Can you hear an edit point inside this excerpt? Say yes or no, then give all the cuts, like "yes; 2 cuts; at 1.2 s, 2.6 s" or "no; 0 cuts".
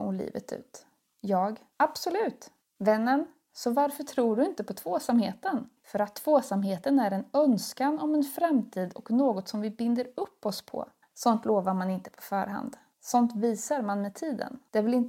yes; 2 cuts; at 5.8 s, 11.0 s